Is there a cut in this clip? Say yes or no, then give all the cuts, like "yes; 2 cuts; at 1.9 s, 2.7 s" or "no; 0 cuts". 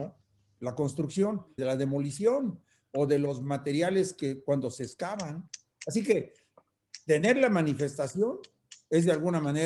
yes; 1 cut; at 1.6 s